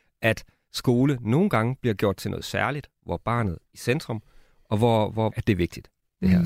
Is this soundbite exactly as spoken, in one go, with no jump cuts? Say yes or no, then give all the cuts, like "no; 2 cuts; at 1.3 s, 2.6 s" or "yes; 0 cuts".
no; 2 cuts; at 3.7 s, 5.3 s